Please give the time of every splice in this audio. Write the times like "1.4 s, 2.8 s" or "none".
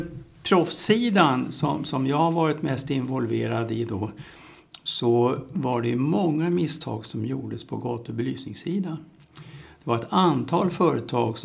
none